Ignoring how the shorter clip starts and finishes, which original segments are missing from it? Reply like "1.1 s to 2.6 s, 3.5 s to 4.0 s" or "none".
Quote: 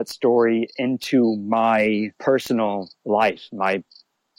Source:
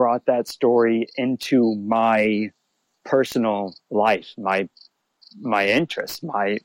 2.5 s to 3.0 s

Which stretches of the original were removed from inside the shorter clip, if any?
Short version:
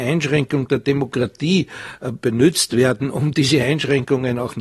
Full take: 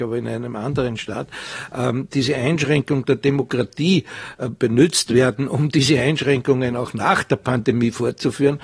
none

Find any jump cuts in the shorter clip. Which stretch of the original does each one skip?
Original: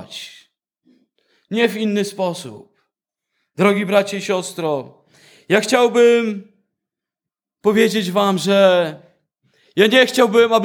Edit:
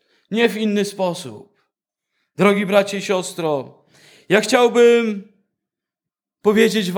none

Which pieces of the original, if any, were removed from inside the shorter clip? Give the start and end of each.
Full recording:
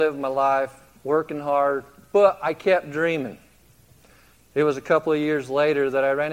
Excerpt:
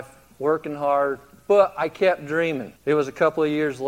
3.4 s to 4.5 s

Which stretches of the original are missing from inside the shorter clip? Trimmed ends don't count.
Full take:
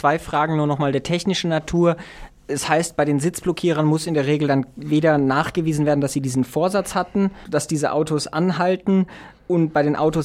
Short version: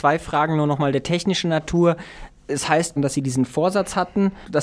3.0 s to 5.9 s

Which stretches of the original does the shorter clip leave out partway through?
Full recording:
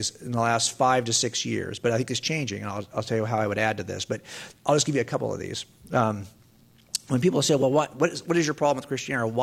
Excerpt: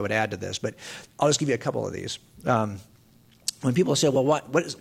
none

